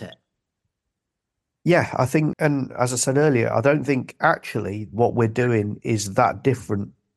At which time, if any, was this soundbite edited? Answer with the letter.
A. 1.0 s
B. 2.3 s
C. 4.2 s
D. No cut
B